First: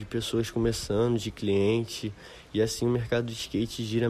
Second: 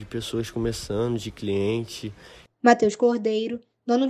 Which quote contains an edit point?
second; 1 cut; at 2.5 s

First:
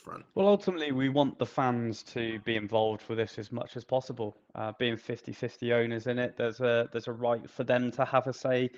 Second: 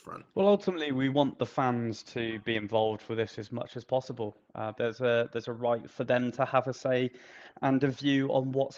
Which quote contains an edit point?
second; 1 cut; at 4.8 s

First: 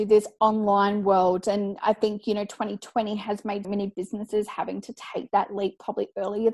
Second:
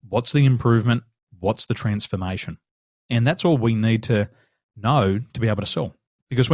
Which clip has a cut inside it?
first; 1 cut; at 3.6 s

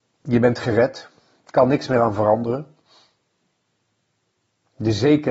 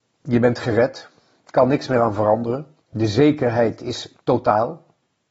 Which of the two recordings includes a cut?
second; 1 cut; at 2.8 s

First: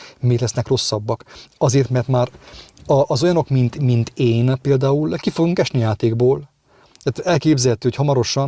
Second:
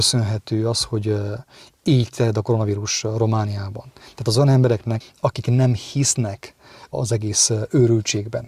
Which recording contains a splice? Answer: second; 2 cuts; at 5.0 s, 6.9 s

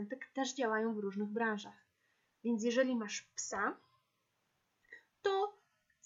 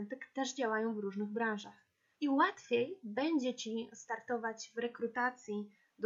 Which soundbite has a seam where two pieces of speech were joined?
second; 1 cut; at 2.2 s

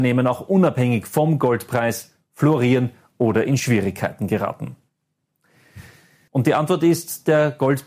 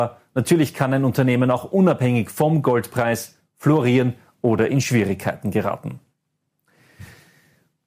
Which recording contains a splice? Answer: first; 1 cut; at 6.3 s

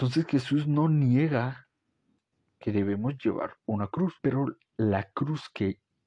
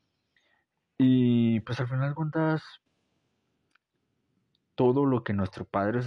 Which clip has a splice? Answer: first; 1 cut; at 4.2 s

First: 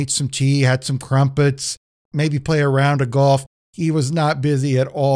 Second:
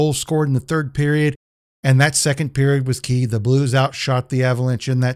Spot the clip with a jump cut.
second; 1 cut; at 1.7 s

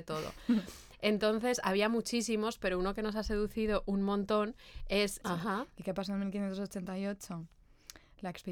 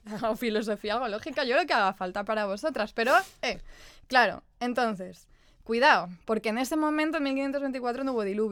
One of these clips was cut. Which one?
first; 1 cut; at 5.2 s

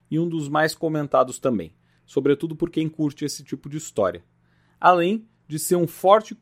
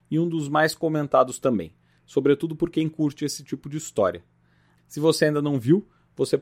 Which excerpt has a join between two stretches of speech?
second; 1 cut; at 4.8 s

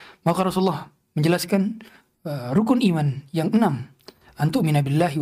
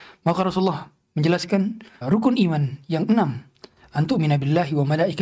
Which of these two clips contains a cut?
second; 1 cut; at 2.0 s

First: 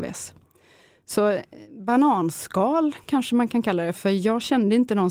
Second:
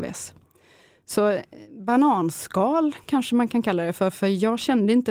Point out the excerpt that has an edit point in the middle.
first; 1 cut; at 3.9 s

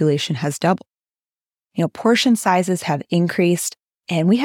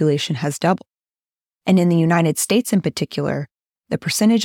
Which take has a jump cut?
first; 1 cut; at 1.5 s

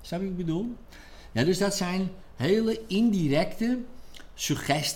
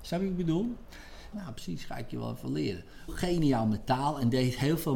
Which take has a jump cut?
second; 2 cuts; at 1.3 s, 3.1 s

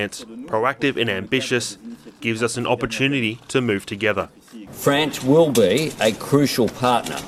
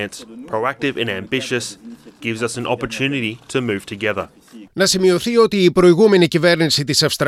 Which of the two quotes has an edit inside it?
second; 1 cut; at 4.6 s

